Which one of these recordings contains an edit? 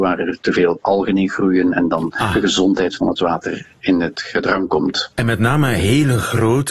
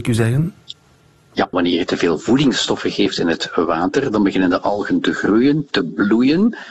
second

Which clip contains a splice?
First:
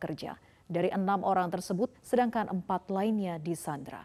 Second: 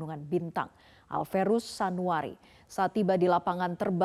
first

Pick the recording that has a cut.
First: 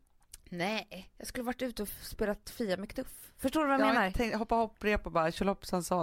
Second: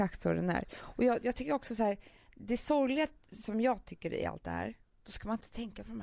second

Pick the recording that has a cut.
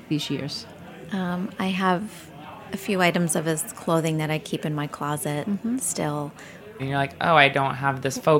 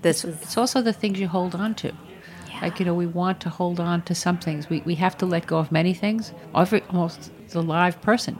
first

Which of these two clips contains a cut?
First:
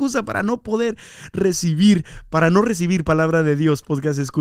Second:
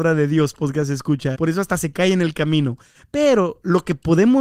second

